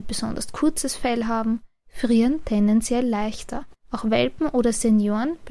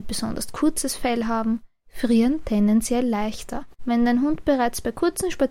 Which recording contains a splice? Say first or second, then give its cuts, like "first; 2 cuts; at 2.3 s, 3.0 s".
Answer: second; 1 cut; at 3.8 s